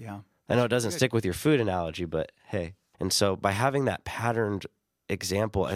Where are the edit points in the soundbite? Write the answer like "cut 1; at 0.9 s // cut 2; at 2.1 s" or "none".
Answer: cut 1; at 2.9 s